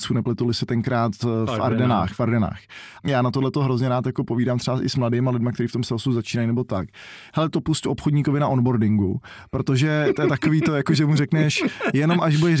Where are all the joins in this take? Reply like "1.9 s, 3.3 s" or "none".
3.0 s, 7.3 s